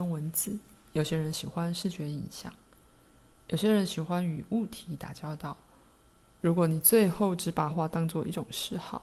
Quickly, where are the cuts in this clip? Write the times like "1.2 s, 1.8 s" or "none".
6.4 s, 7.7 s